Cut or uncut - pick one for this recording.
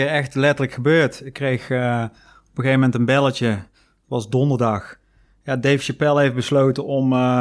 uncut